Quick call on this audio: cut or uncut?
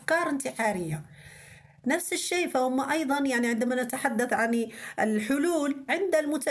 uncut